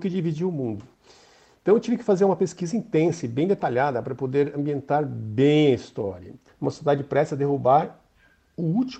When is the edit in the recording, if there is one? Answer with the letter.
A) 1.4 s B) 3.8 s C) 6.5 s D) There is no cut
C